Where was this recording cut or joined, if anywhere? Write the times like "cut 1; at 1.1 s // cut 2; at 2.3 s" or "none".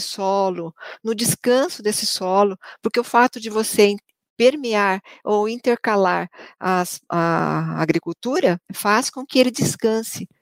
cut 1; at 8.6 s